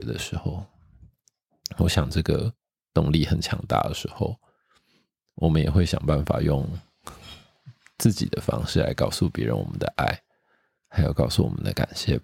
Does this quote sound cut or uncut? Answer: uncut